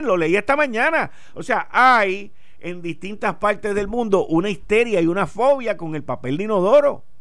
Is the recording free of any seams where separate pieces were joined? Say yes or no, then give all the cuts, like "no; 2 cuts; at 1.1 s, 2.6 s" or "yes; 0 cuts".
yes; 0 cuts